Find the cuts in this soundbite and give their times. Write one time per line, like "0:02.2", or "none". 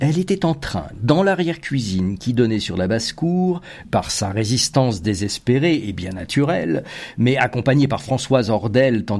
0:03.8